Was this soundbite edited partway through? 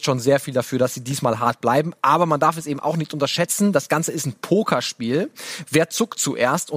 no; 0 cuts

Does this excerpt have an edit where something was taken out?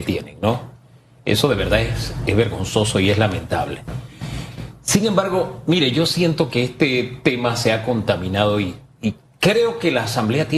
no; 0 cuts

